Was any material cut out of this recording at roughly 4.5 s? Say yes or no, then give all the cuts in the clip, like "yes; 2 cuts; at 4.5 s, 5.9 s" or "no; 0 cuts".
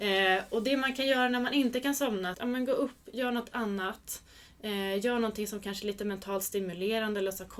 no; 1 cut; at 2.3 s